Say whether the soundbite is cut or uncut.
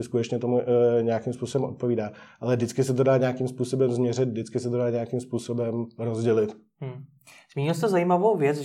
uncut